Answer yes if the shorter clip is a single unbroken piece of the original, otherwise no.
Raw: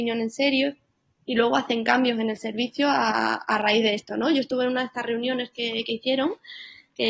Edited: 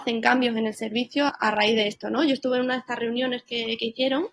no